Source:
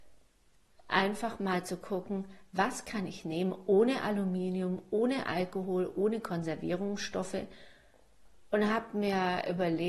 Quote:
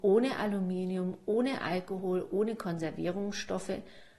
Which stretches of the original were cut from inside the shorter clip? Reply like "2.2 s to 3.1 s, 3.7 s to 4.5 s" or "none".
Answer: none